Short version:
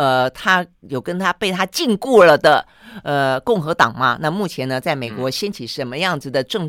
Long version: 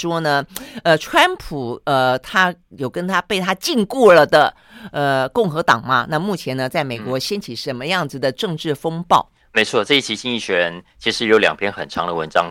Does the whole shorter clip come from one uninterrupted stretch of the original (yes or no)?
yes